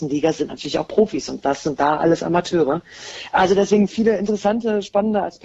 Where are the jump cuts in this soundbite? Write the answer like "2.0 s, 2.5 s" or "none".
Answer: none